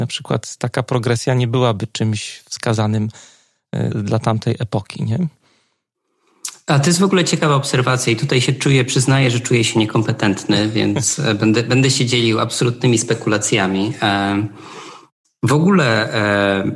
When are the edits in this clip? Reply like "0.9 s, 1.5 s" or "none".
3.9 s